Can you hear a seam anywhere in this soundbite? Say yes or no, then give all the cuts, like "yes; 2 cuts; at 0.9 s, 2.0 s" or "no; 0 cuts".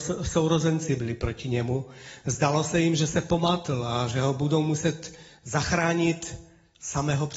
no; 0 cuts